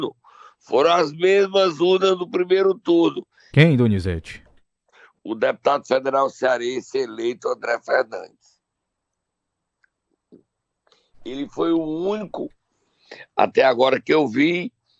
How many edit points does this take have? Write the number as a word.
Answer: one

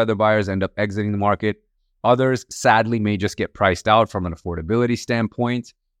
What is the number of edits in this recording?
zero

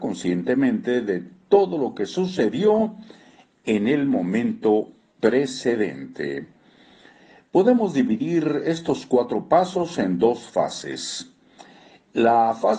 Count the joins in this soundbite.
zero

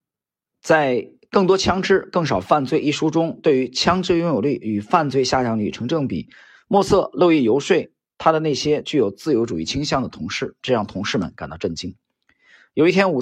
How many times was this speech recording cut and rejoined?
two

